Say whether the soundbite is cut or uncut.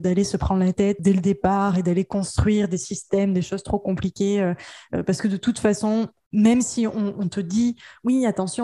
cut